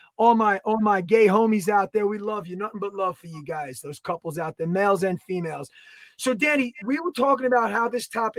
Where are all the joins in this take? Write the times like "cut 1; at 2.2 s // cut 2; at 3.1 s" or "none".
none

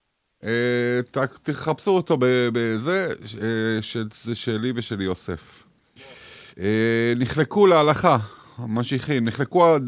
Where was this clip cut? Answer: cut 1; at 6.5 s

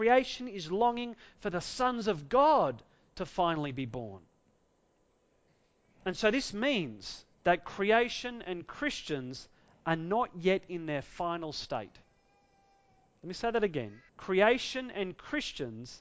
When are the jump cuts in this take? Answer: cut 1; at 7.3 s // cut 2; at 14.1 s

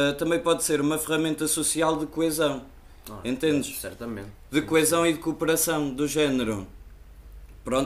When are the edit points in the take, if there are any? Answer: none

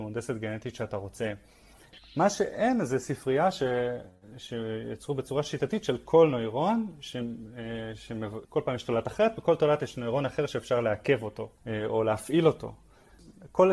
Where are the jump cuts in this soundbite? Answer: cut 1; at 8.4 s // cut 2; at 11.6 s

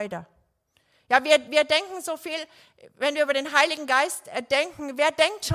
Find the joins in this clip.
none

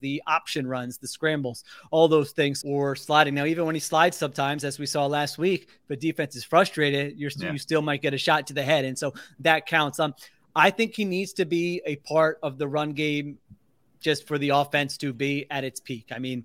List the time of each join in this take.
cut 1; at 2.6 s

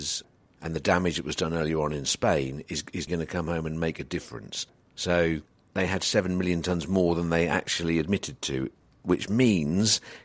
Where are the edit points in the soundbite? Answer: cut 1; at 3.1 s // cut 2; at 4.9 s

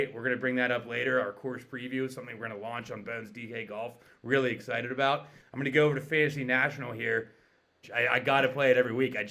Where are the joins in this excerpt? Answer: cut 1; at 5.4 s // cut 2; at 7.8 s

